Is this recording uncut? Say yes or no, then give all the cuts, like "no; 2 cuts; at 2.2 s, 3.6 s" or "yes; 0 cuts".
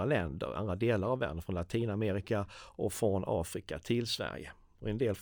yes; 0 cuts